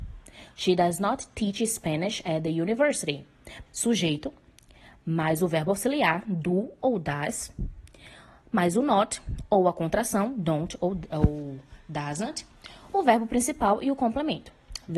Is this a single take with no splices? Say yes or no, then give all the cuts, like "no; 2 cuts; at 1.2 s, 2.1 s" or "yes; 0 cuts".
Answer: no; 1 cut; at 3.7 s